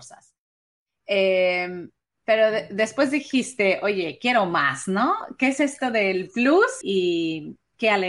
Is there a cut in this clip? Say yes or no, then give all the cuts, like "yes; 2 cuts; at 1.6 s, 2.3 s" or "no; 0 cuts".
yes; 1 cut; at 6.8 s